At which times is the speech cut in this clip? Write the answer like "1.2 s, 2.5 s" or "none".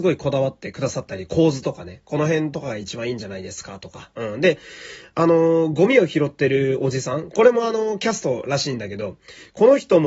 none